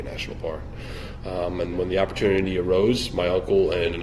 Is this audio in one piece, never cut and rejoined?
no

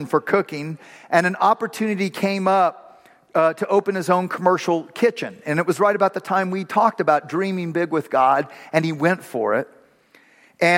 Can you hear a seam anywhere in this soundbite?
no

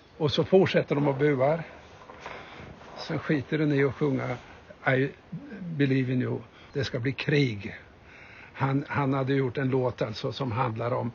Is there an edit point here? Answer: yes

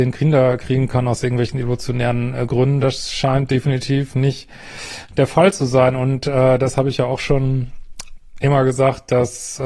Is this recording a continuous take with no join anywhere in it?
yes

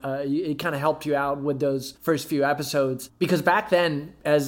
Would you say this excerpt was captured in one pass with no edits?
yes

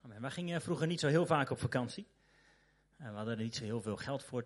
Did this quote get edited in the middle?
no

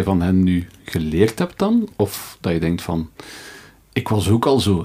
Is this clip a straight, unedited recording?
yes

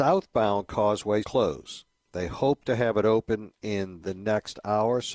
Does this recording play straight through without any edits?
no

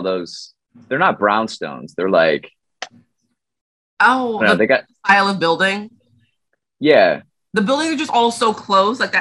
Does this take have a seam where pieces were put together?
no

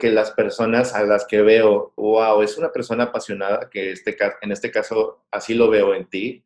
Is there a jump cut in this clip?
yes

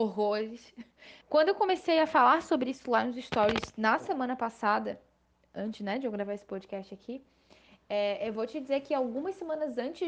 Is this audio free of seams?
no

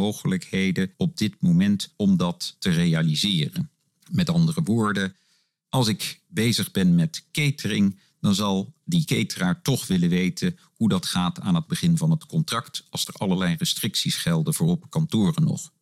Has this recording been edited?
no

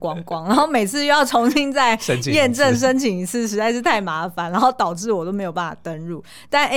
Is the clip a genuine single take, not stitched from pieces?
yes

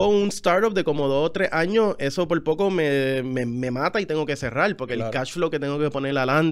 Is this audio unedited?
yes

